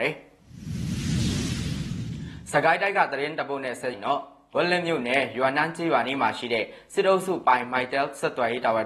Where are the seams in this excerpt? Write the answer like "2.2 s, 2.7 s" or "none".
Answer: 3.9 s